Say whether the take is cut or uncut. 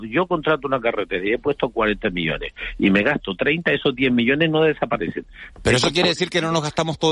cut